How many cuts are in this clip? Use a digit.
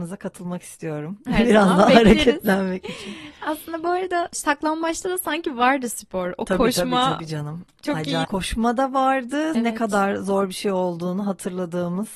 2